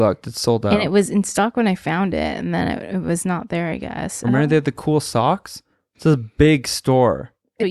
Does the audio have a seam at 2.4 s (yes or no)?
no